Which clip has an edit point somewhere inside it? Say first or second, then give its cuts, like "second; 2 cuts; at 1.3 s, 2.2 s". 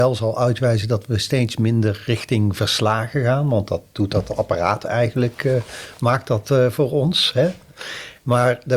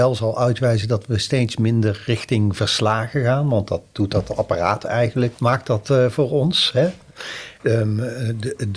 second; 2 cuts; at 5.4 s, 7.6 s